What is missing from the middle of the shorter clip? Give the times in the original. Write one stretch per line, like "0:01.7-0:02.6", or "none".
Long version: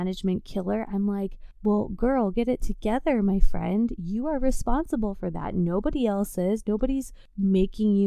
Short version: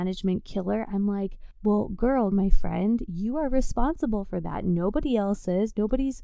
0:02.3-0:03.2